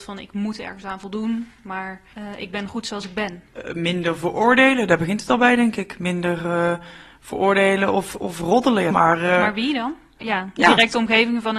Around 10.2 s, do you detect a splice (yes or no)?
yes